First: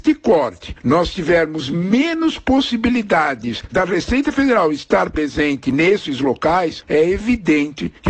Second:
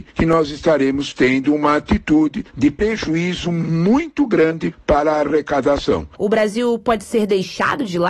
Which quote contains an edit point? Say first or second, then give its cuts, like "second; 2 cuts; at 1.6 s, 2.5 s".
second; 1 cut; at 6.2 s